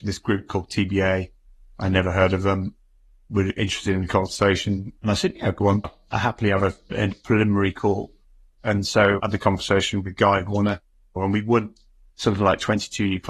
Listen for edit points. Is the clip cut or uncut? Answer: cut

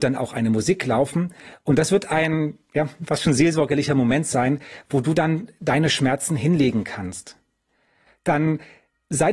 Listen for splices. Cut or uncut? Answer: cut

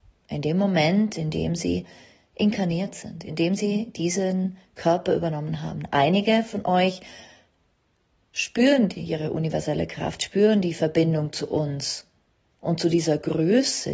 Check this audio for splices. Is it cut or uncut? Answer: uncut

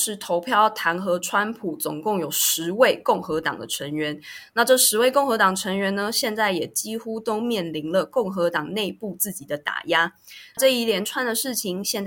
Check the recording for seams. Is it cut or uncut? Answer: cut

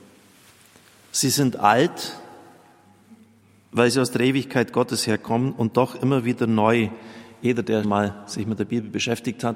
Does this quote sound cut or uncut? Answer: cut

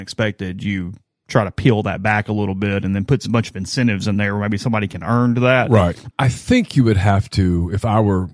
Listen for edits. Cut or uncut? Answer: cut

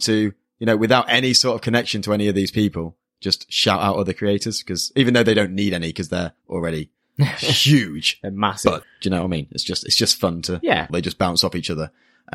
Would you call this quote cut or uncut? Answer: cut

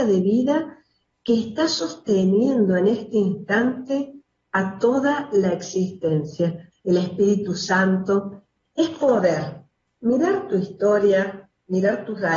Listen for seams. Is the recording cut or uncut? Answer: cut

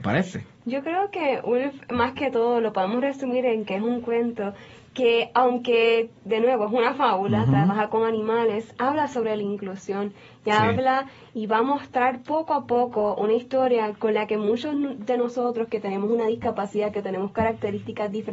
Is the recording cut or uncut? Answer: uncut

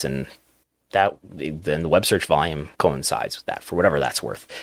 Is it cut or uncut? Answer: cut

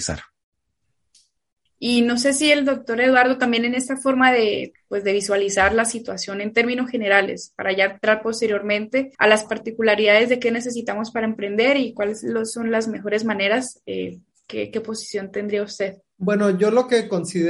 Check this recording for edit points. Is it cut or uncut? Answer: cut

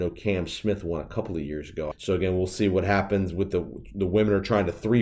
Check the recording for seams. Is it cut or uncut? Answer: cut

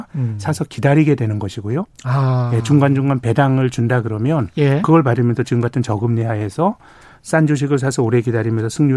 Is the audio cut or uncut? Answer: cut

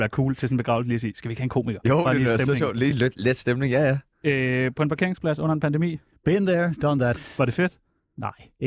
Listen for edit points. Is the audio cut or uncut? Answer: uncut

